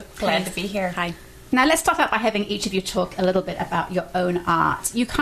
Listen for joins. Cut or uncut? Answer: uncut